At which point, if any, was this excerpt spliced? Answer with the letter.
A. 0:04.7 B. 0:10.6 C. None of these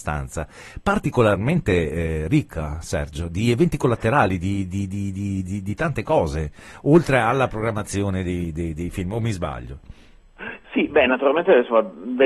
C